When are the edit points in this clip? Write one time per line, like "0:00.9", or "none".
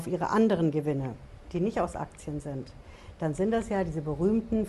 0:01.4